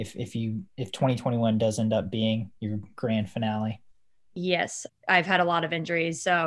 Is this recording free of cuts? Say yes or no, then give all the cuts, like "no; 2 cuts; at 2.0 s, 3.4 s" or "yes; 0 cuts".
no; 1 cut; at 4.9 s